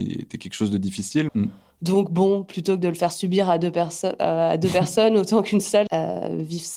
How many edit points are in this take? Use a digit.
2